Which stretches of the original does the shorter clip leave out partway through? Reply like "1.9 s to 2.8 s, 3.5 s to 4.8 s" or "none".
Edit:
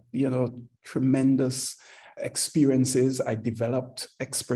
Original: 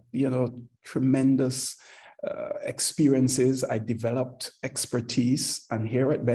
2.2 s to 2.6 s